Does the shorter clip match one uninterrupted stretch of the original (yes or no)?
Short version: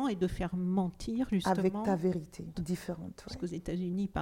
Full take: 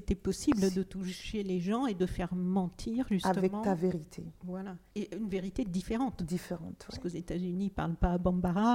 no